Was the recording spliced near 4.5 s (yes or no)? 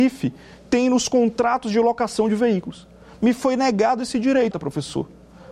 yes